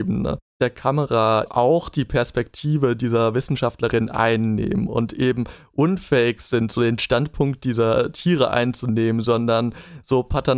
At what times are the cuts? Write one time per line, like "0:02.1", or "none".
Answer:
0:01.5